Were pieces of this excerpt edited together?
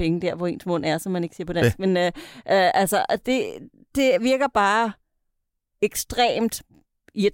no; 0 cuts

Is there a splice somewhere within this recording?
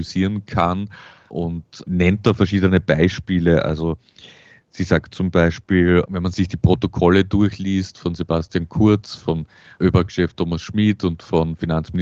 no; 0 cuts

